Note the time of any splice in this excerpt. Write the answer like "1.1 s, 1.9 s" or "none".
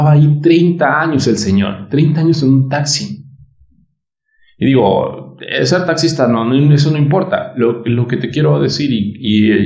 none